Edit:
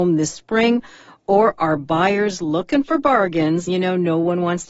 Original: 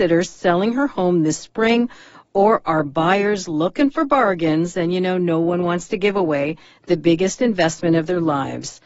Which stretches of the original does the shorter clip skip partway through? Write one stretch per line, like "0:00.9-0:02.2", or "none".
0:04.7-0:04.9